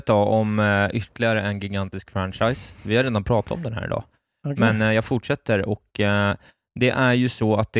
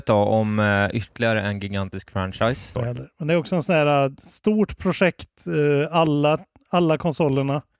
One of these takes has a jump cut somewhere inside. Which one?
second; 1 cut; at 2.7 s

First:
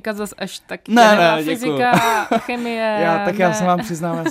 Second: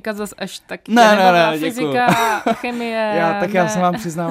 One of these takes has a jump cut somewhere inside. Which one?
first; 1 cut; at 1.2 s

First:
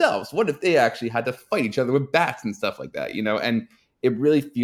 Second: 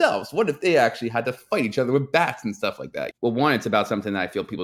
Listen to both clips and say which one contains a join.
second; 1 cut; at 3.1 s

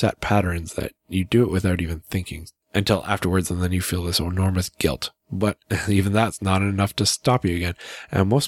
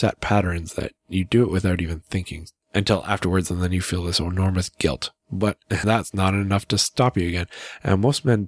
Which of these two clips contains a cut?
second; 1 cut; at 5.8 s

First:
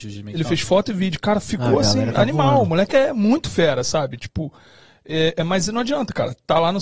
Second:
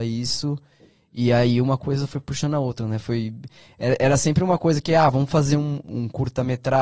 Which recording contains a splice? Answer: second; 1 cut; at 5.8 s

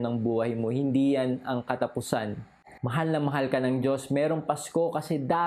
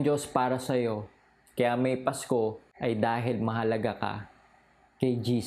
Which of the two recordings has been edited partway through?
first; 1 cut; at 2.8 s

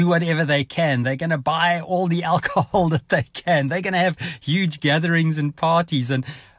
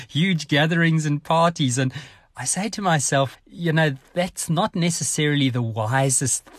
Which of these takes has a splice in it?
second; 1 cut; at 3.3 s

